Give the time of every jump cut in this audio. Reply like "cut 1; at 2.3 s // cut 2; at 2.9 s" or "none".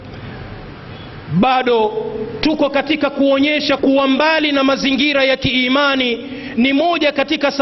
cut 1; at 3.8 s